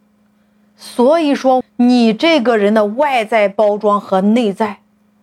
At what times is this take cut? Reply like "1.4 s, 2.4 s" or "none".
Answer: 1.6 s